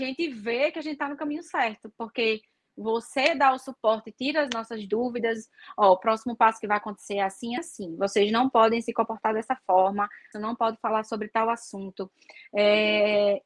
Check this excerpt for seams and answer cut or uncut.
cut